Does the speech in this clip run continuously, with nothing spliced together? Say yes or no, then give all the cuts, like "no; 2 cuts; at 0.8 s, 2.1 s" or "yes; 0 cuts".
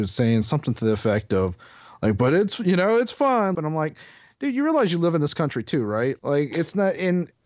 no; 2 cuts; at 3.5 s, 6.2 s